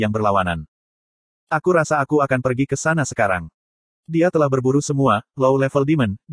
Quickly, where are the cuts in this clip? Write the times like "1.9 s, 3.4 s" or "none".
none

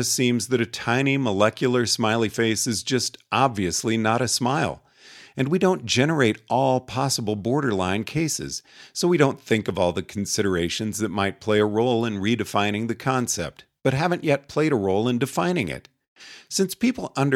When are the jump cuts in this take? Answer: none

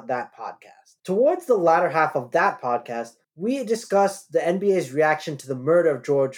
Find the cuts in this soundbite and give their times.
1.0 s

